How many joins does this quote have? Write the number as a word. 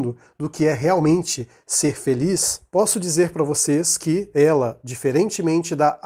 zero